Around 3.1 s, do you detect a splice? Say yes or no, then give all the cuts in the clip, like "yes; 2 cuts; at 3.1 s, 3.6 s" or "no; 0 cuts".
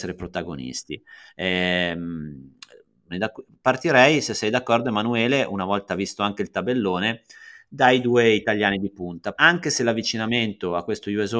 yes; 2 cuts; at 3.1 s, 9.3 s